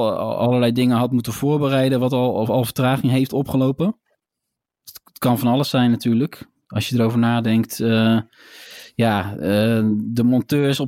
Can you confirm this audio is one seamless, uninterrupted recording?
yes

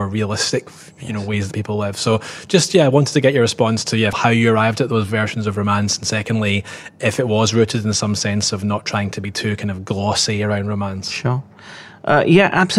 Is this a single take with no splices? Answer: no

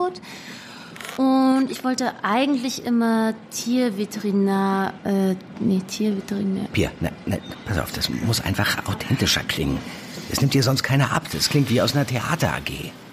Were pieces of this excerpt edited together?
no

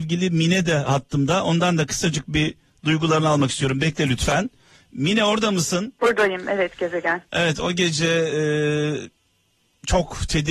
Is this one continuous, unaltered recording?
no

